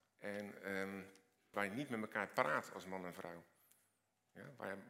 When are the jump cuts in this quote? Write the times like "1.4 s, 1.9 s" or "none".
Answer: 1.5 s